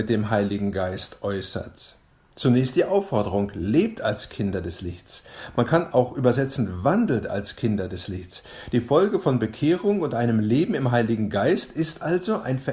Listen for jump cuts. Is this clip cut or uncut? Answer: uncut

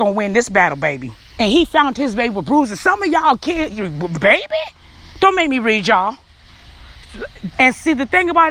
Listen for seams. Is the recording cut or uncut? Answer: cut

